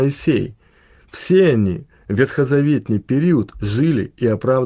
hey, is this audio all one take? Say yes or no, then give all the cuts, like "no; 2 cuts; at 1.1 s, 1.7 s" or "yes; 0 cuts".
yes; 0 cuts